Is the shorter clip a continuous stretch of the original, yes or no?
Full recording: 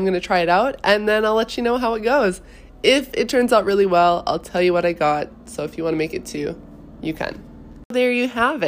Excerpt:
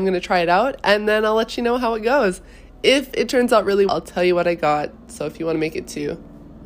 no